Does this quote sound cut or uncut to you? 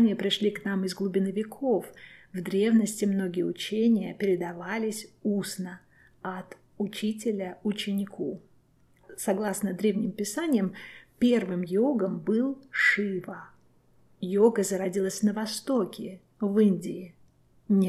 uncut